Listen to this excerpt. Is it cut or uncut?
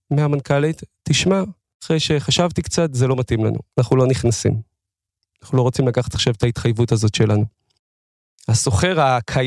cut